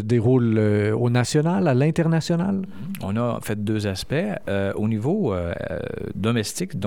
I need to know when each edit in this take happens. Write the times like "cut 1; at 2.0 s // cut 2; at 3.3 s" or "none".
none